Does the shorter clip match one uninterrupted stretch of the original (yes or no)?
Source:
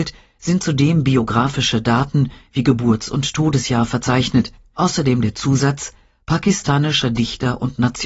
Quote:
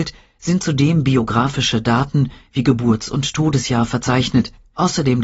yes